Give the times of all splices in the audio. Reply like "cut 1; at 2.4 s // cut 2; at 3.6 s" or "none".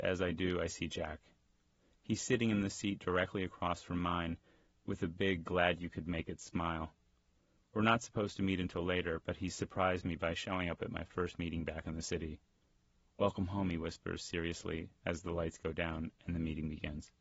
none